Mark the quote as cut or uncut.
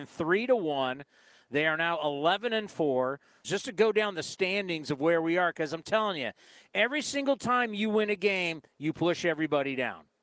cut